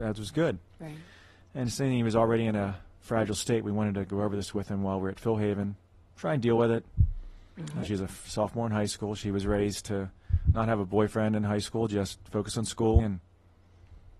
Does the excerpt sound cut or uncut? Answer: cut